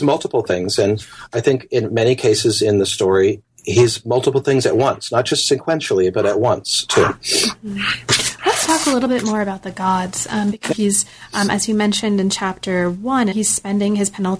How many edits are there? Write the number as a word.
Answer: two